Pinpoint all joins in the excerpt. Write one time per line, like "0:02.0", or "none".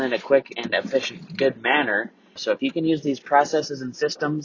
0:02.4